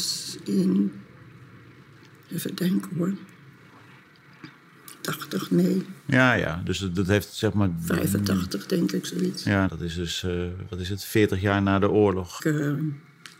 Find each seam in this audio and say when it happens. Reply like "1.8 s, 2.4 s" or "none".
9.7 s, 12.4 s